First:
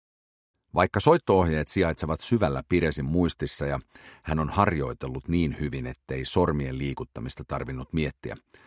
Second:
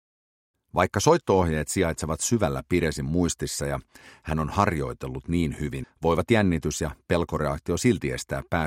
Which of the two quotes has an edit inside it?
second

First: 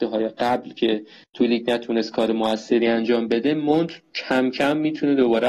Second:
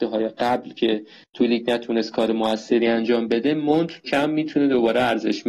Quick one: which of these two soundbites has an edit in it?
second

